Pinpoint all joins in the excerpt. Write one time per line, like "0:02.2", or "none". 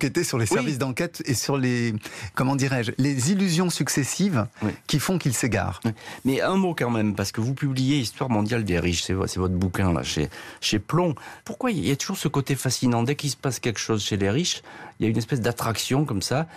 none